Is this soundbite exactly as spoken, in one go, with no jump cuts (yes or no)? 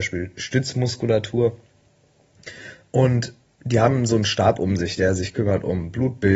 yes